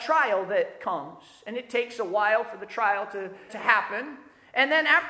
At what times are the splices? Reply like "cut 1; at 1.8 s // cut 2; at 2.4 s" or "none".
cut 1; at 3.5 s